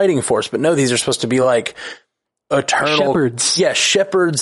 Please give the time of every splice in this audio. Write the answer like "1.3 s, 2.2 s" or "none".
none